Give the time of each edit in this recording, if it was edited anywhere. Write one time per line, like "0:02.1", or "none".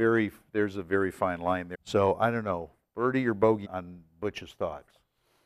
0:01.7
0:03.6